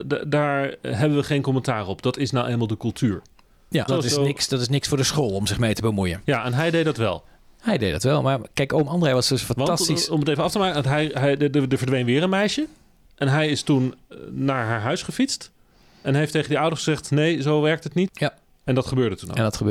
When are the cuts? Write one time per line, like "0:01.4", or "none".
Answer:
0:03.9
0:18.1